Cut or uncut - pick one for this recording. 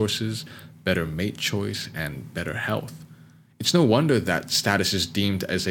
uncut